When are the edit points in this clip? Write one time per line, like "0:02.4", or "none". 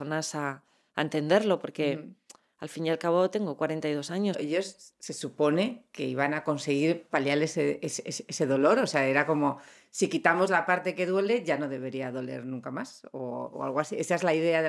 0:04.3